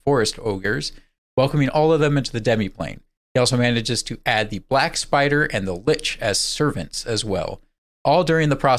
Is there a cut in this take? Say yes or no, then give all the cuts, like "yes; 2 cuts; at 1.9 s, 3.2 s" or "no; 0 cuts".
no; 0 cuts